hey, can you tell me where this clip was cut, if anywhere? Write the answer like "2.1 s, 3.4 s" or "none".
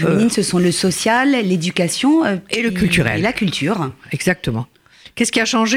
none